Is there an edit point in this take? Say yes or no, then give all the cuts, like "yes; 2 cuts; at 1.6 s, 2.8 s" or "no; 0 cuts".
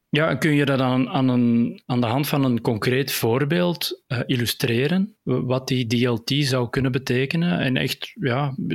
no; 0 cuts